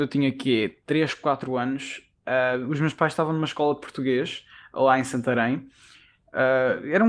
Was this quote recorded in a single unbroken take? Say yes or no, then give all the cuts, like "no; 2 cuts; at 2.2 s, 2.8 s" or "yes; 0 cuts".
yes; 0 cuts